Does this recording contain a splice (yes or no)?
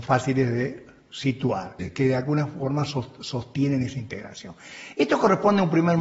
yes